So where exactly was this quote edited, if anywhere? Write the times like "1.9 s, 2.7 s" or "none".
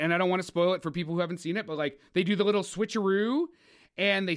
none